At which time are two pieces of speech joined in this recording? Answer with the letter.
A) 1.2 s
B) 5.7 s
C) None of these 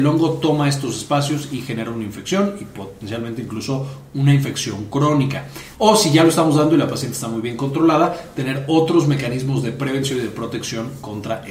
B